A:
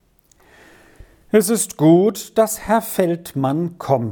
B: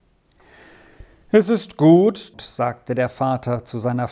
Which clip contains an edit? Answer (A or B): B